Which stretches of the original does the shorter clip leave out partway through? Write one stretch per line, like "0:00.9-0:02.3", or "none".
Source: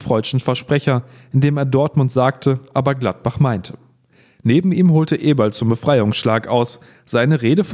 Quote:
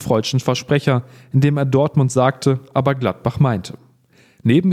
none